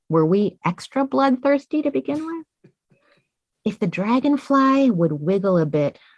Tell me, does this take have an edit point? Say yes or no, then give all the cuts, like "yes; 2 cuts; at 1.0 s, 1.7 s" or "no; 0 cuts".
no; 0 cuts